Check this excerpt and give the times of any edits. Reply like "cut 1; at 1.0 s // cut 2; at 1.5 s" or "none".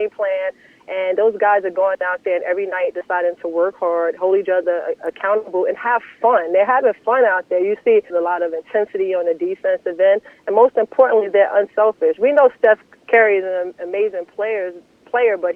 cut 1; at 8.1 s

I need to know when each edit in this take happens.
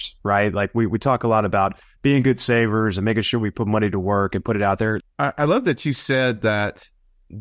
cut 1; at 5.0 s

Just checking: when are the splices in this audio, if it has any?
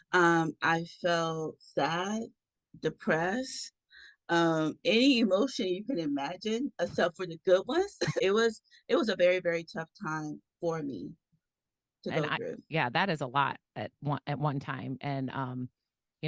cut 1; at 8.2 s

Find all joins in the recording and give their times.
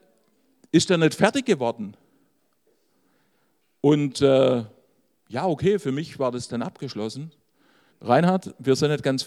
cut 1; at 7.9 s

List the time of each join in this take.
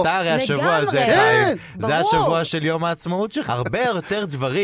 cut 1; at 3.5 s

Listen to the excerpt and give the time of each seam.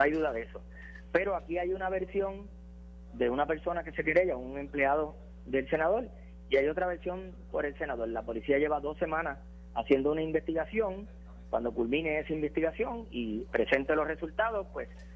none

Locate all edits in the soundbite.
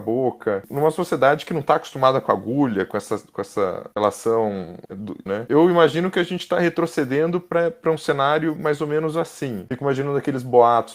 cut 1; at 5.3 s // cut 2; at 9.7 s

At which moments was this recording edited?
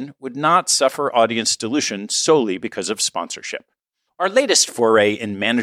cut 1; at 4.1 s

